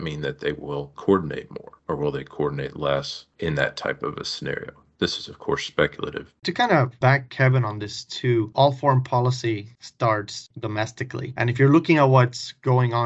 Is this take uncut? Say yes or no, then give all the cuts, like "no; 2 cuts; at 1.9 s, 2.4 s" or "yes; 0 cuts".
no; 1 cut; at 6.4 s